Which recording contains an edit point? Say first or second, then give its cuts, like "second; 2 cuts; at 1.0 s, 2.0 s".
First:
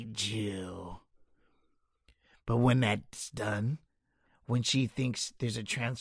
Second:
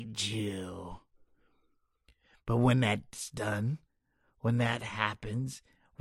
first; 1 cut; at 4.3 s